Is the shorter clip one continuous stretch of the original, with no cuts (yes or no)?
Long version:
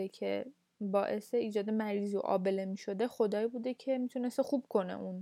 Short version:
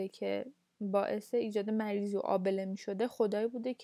yes